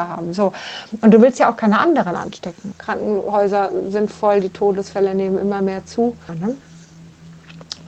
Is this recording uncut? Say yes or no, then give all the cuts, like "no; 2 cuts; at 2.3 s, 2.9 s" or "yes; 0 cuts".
no; 2 cuts; at 2.7 s, 6.3 s